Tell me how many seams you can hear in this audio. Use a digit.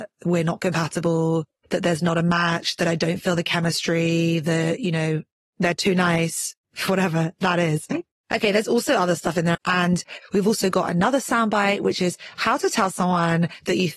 2